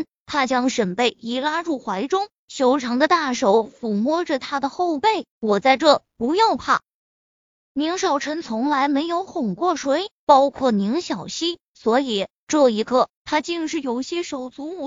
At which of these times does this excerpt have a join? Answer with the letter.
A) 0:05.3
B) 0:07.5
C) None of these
A